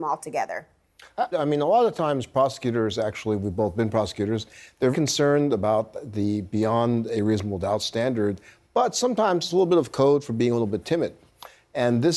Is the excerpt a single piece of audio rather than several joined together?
no; 2 cuts; at 1.3 s, 4.9 s

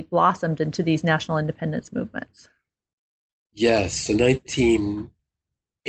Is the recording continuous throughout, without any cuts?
yes; 0 cuts

